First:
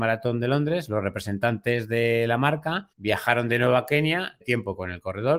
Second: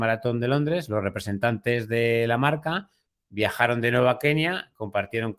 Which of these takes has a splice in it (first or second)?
first